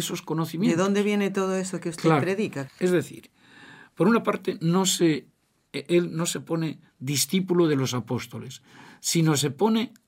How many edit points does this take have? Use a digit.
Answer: 1